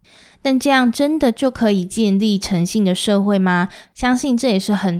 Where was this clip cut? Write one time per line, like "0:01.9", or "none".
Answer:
0:03.8